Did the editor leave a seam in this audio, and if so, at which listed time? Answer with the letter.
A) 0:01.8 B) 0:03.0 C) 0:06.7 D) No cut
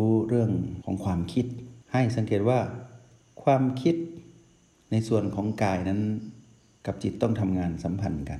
A